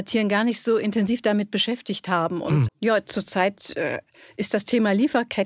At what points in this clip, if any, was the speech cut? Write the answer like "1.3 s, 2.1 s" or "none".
2.7 s